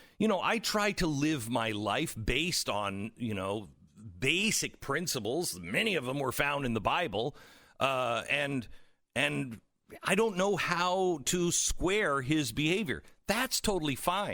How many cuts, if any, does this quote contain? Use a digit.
0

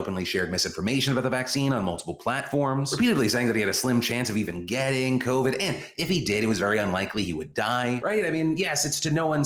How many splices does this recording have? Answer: 1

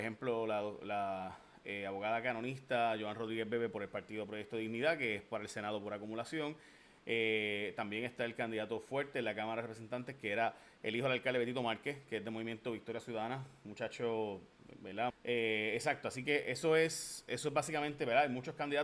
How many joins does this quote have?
1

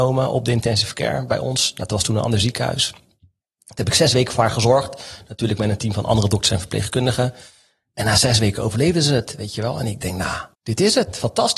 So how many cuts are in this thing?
1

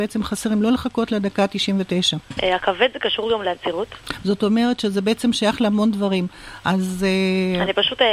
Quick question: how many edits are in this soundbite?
1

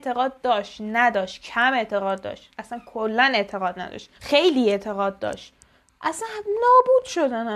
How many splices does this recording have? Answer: 1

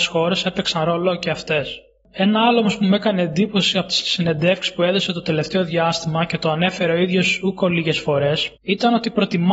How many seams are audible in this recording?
1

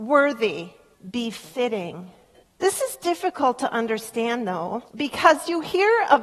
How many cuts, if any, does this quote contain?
3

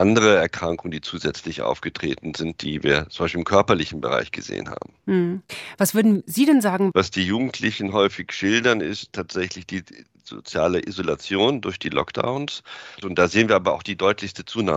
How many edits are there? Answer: 2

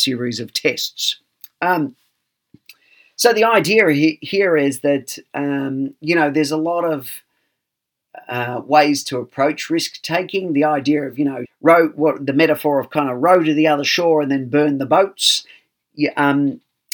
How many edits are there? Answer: 1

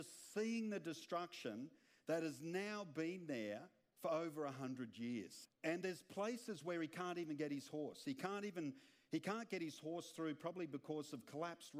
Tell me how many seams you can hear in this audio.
1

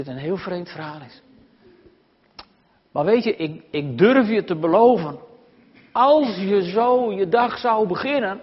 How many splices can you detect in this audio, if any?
1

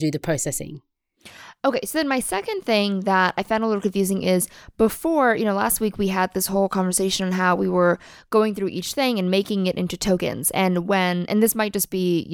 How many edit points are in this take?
0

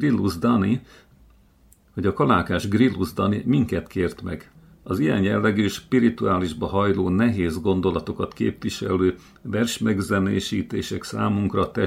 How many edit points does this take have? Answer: 0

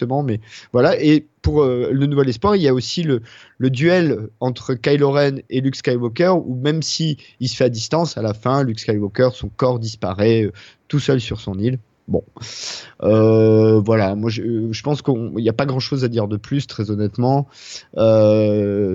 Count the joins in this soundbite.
0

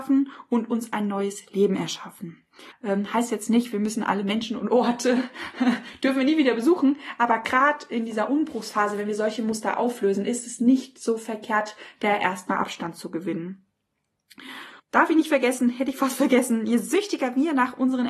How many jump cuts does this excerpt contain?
2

